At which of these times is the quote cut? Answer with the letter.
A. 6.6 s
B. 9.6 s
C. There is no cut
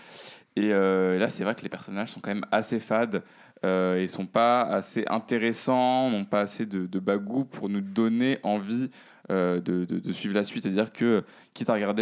C